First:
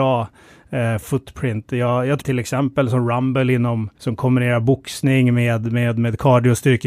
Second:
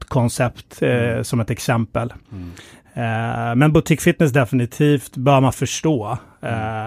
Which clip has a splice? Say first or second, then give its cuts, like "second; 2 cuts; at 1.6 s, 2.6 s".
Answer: first; 2 cuts; at 2.2 s, 3.9 s